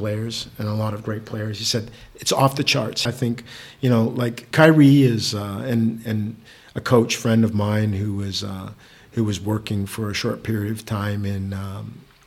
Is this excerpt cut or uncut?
cut